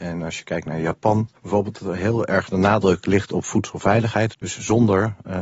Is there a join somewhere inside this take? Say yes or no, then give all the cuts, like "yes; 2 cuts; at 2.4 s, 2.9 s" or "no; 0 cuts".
yes; 2 cuts; at 1.4 s, 4.3 s